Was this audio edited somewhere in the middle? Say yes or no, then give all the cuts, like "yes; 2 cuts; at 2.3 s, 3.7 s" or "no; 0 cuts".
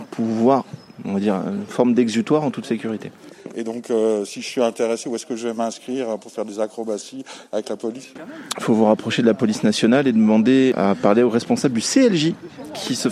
no; 0 cuts